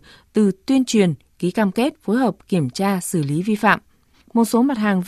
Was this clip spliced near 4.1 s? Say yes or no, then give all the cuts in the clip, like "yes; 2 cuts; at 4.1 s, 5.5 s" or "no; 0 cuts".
yes; 1 cut; at 4.1 s